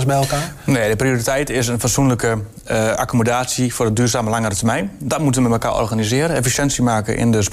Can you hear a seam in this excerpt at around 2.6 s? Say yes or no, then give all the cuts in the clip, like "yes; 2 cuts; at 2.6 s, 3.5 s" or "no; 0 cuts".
no; 0 cuts